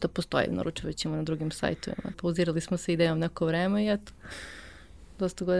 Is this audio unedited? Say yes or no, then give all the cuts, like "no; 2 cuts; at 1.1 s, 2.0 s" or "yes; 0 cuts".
no; 1 cut; at 2.1 s